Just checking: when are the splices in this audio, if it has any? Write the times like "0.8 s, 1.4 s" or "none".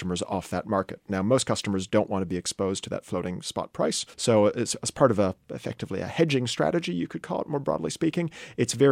4.1 s